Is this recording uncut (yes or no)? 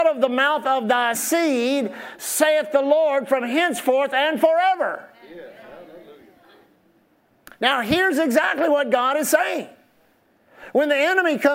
no